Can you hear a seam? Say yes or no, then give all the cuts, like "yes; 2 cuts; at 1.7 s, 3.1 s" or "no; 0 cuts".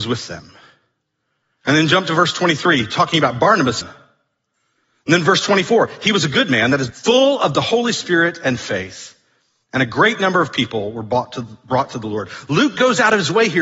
yes; 2 cuts; at 3.8 s, 6.9 s